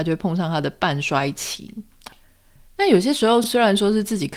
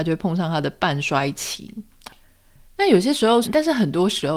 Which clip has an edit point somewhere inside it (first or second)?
second